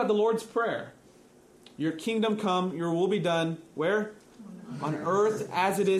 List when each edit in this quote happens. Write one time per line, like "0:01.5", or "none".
none